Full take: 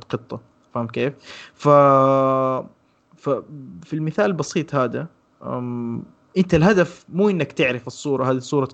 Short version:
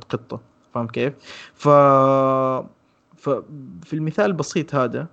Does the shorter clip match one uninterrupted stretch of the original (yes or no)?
yes